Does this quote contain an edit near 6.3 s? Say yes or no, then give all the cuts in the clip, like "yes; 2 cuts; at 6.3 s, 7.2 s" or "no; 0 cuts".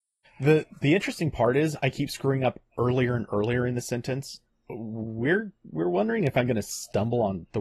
no; 1 cut; at 4.5 s